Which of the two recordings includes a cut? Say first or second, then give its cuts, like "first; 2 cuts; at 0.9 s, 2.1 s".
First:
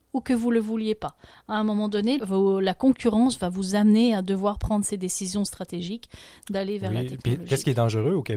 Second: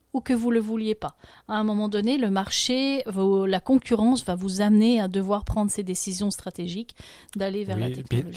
first; 1 cut; at 2.2 s